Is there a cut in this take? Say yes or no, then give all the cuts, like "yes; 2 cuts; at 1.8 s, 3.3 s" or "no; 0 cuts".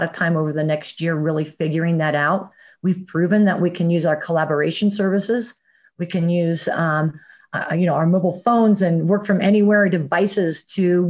no; 0 cuts